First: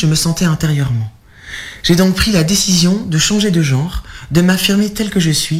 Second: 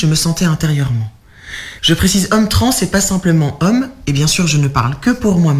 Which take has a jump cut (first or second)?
second